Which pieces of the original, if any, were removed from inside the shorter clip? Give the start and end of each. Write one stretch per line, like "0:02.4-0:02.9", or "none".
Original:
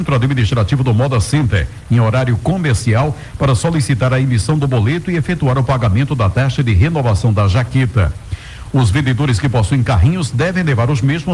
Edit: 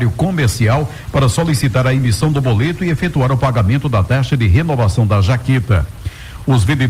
none